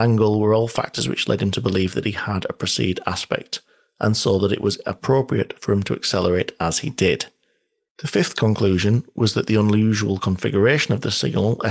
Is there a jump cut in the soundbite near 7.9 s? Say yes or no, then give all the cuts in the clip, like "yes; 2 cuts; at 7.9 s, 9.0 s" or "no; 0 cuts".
yes; 1 cut; at 7.9 s